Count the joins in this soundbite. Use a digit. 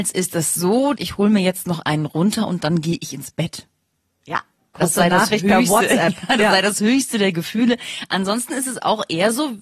1